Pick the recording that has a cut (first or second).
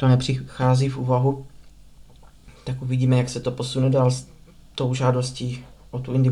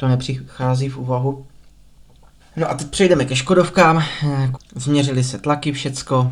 second